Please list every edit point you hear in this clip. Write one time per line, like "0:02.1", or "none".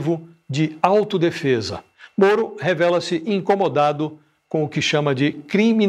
none